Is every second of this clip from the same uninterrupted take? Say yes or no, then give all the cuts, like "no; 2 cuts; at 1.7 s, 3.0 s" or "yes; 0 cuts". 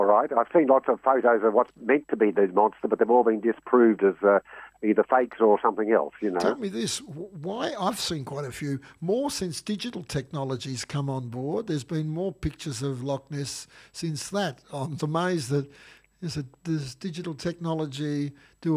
no; 1 cut; at 15.0 s